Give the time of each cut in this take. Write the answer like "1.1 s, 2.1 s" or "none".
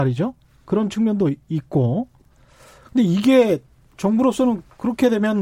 none